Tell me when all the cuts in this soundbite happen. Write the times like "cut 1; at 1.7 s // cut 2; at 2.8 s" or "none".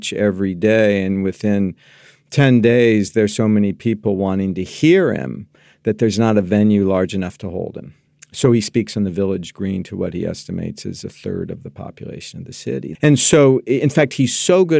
cut 1; at 12.9 s